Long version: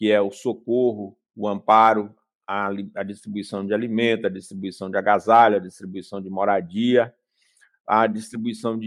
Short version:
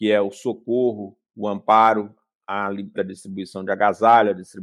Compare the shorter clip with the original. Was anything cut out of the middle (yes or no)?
yes